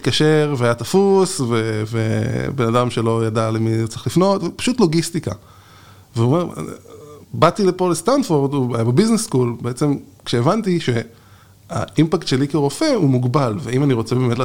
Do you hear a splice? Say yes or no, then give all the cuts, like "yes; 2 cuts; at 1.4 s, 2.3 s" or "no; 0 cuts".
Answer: no; 0 cuts